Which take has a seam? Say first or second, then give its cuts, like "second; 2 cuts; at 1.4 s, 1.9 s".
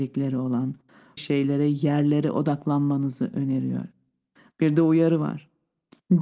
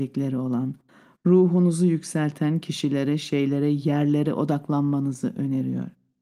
first; 1 cut; at 1.2 s